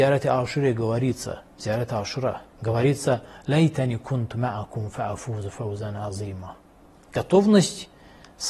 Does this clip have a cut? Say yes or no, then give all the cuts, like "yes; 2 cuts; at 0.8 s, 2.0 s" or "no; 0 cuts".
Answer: yes; 2 cuts; at 2.5 s, 7.0 s